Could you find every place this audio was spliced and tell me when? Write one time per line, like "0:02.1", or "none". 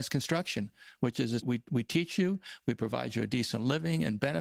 0:01.4
0:02.6

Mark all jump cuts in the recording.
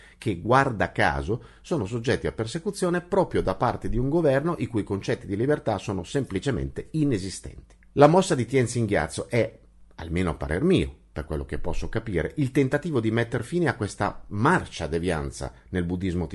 0:07.8

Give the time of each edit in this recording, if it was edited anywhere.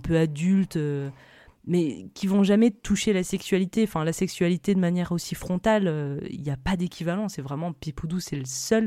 none

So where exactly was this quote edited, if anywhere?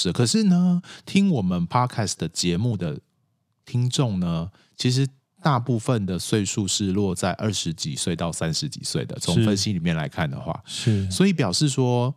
none

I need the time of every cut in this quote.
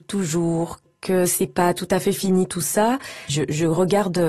0:03.3

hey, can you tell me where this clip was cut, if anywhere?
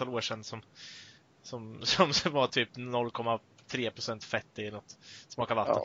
none

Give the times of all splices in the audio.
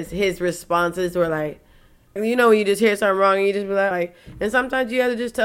0:02.2
0:03.9

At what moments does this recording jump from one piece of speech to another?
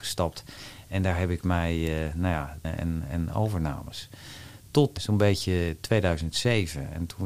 0:02.6
0:05.0

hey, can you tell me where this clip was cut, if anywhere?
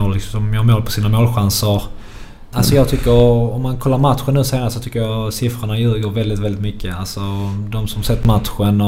0:02.5

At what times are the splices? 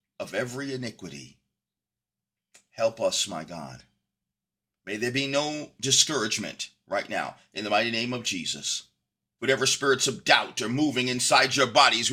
0:09.4

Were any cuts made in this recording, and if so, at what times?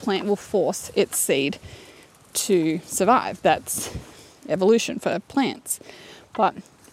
none

